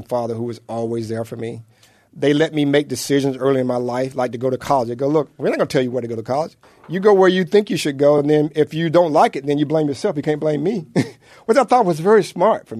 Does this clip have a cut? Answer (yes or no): no